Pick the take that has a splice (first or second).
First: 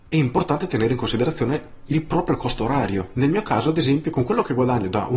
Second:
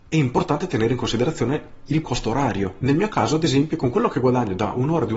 second